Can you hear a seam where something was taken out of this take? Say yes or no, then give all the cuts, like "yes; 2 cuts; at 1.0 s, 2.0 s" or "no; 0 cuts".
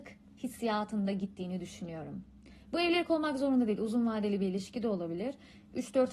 no; 0 cuts